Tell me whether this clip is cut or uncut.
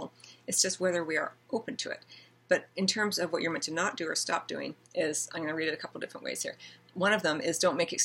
cut